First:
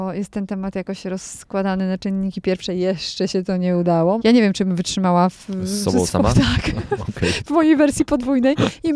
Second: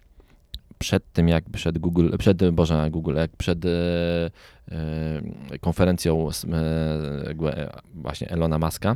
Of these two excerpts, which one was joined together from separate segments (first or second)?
first